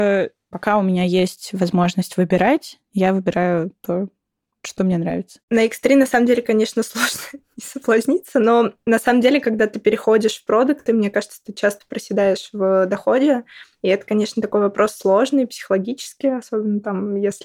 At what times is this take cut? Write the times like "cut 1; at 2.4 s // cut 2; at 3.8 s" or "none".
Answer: none